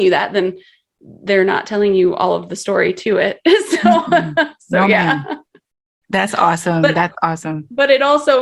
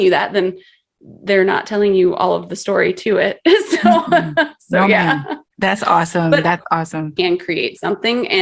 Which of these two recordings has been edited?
second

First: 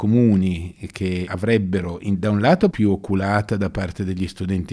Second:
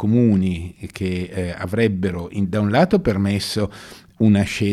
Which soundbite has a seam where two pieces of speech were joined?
first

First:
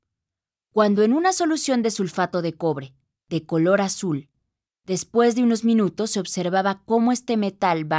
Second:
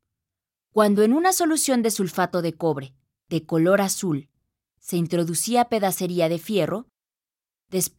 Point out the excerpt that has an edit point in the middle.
first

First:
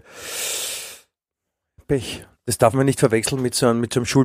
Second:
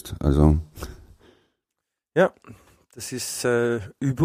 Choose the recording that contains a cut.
first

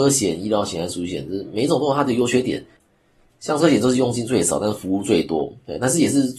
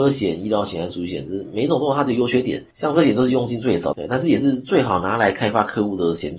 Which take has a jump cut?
second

